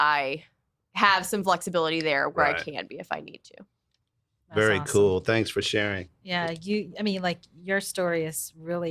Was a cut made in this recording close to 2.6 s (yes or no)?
no